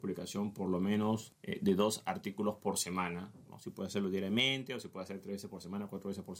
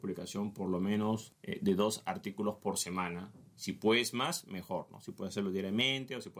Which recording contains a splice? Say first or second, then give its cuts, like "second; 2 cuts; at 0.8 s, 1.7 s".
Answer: first; 1 cut; at 3.5 s